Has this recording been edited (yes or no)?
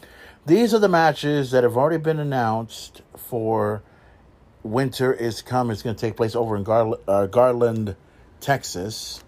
no